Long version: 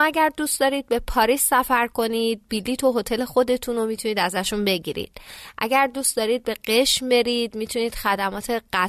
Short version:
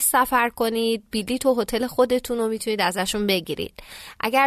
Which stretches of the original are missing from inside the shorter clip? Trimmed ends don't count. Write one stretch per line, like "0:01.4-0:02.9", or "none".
none